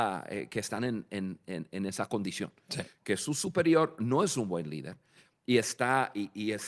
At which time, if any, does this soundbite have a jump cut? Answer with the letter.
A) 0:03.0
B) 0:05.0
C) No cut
C